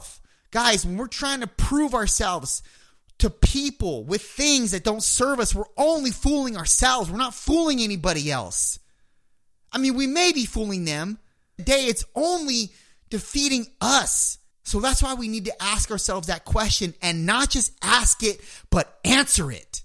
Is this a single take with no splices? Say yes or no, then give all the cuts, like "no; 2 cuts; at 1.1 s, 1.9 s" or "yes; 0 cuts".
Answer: no; 2 cuts; at 11.6 s, 14.5 s